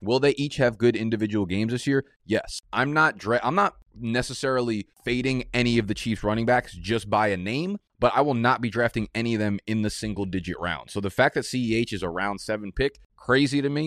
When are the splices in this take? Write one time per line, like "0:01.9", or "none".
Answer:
none